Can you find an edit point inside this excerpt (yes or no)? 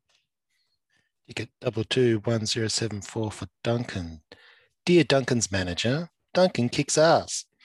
no